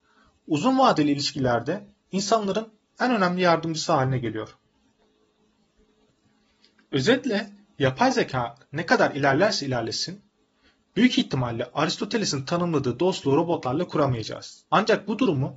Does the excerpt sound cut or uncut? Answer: cut